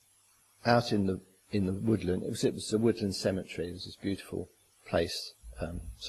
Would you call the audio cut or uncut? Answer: uncut